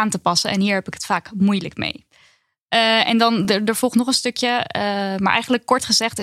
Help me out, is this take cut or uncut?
uncut